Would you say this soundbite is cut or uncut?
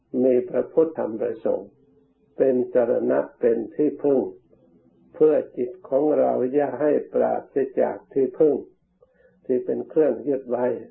cut